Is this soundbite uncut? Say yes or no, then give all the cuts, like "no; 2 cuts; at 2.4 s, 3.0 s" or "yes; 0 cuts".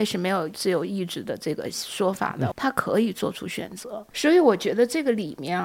no; 2 cuts; at 2.5 s, 4.1 s